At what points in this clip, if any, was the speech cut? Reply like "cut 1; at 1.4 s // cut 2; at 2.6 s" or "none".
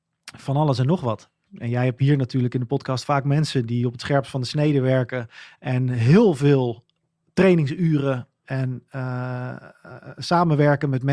cut 1; at 1.5 s